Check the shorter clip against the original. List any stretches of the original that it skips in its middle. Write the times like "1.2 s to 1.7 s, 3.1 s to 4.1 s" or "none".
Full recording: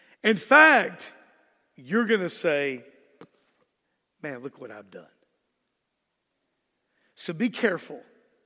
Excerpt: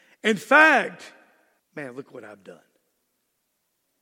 1.6 s to 4.1 s